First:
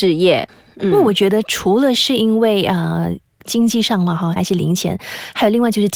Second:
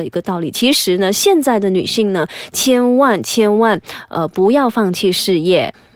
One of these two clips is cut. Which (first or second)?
first